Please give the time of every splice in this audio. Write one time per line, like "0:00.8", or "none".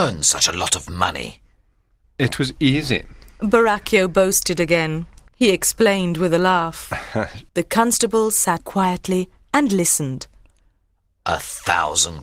0:05.3
0:07.5
0:08.6